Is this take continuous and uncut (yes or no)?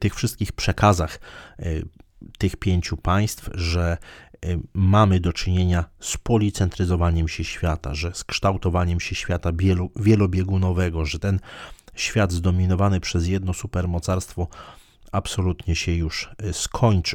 yes